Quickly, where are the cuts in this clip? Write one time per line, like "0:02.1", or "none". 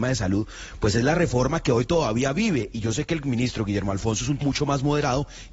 0:04.4